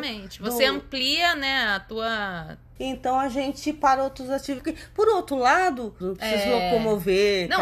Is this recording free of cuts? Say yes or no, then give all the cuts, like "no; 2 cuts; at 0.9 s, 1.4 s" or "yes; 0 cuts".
no; 3 cuts; at 2.8 s, 4.6 s, 6.0 s